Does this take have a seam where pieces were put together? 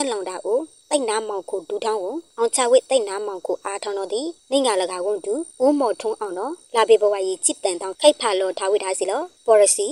yes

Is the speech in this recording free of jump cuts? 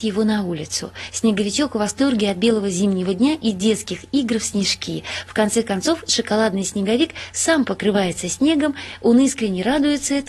yes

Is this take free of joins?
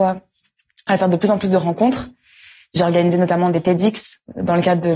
yes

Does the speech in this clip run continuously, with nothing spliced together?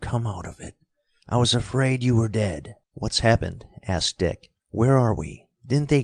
no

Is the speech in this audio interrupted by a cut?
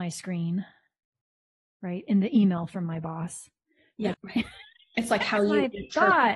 yes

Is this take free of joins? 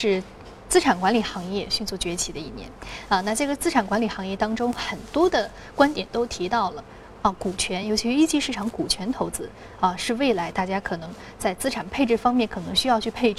yes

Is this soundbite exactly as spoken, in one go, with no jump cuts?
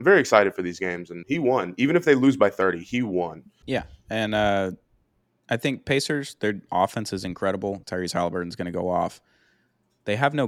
no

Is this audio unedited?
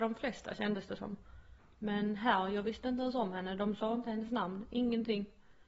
yes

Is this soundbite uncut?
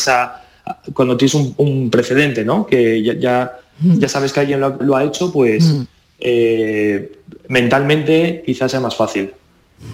no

